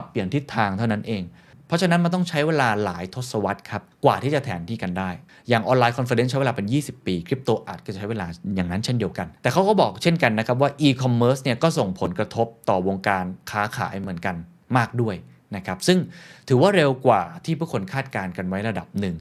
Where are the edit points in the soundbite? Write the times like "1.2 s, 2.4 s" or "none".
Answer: 3.9 s, 9.4 s